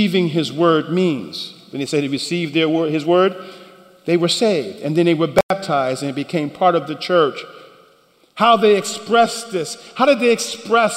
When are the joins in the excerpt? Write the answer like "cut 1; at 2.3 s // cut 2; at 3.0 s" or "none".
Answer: none